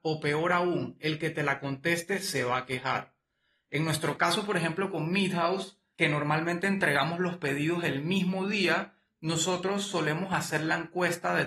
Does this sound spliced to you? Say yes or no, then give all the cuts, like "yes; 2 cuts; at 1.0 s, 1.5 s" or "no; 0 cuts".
no; 0 cuts